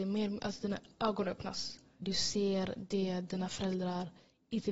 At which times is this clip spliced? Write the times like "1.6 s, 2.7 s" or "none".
2.0 s